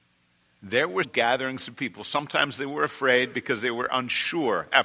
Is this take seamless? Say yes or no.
no